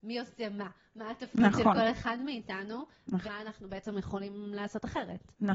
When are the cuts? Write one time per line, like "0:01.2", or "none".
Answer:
0:03.3

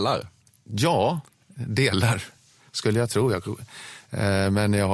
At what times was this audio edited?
none

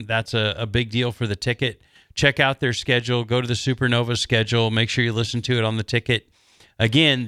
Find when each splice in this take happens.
none

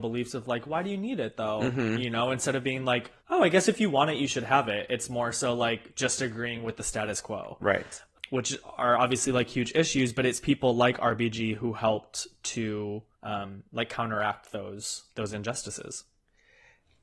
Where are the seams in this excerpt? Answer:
0:03.2
0:13.1
0:15.1

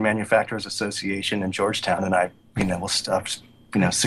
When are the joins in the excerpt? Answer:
none

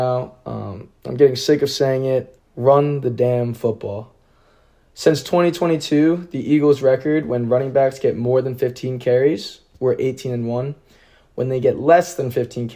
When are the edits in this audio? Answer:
0:02.4

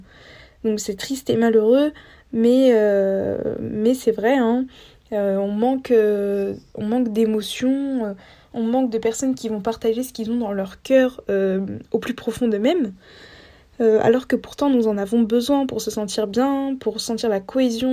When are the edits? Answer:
none

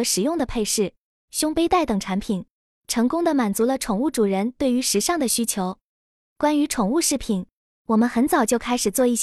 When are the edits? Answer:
0:01.3
0:06.2

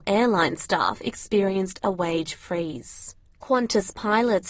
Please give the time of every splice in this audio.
0:03.2

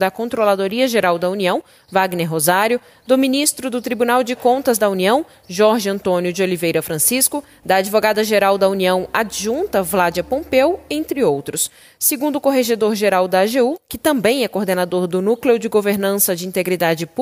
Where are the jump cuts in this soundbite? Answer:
none

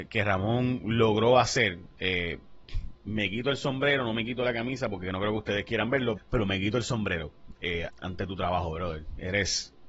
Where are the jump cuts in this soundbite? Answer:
0:06.2
0:07.9

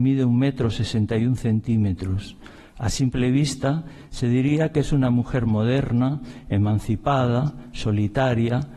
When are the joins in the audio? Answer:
none

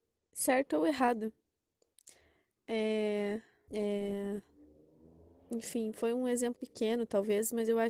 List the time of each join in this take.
0:03.7
0:06.6

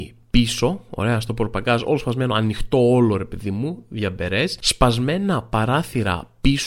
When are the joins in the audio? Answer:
none

